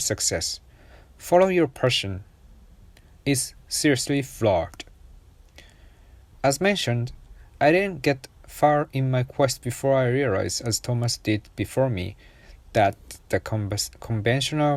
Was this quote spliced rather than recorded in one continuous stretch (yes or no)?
yes